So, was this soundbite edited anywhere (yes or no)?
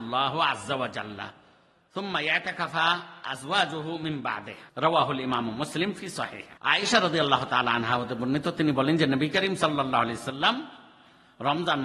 yes